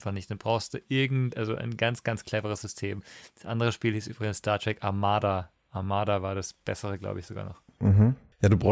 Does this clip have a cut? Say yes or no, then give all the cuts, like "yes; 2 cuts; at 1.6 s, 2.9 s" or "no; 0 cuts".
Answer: no; 0 cuts